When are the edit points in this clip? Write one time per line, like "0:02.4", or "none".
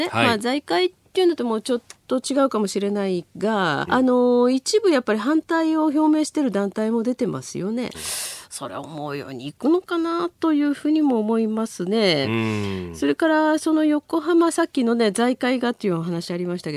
0:03.9
0:07.9